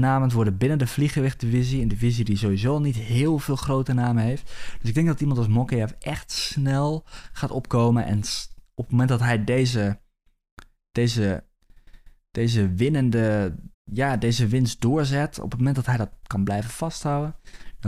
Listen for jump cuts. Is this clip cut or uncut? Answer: cut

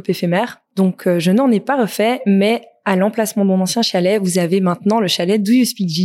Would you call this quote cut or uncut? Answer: uncut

